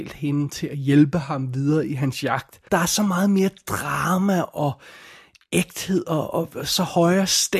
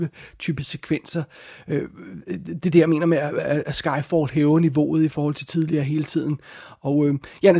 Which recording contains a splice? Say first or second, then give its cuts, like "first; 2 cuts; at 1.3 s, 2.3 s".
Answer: first; 2 cuts; at 2.7 s, 6.3 s